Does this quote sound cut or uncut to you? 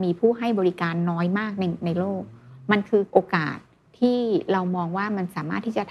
uncut